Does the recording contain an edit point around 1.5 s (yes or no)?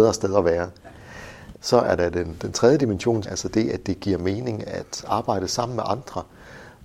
yes